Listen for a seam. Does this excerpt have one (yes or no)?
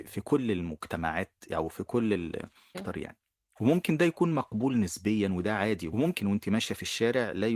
yes